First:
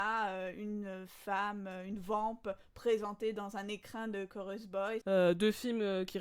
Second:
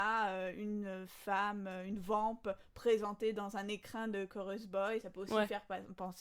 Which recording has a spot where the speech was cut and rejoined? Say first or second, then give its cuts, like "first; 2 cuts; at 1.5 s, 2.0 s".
first; 1 cut; at 5.0 s